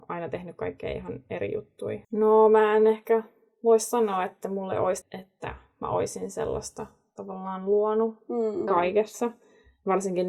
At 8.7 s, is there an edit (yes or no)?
yes